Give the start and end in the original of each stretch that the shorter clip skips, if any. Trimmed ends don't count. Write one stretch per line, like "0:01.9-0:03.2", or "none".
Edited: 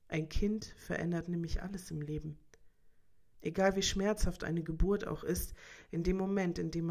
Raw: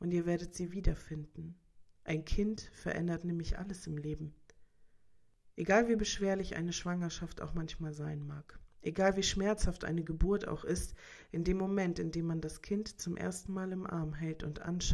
0:05.3-0:08.7